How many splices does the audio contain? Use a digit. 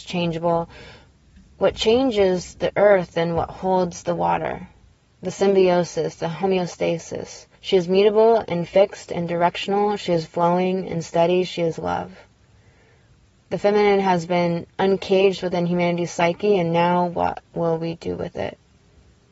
1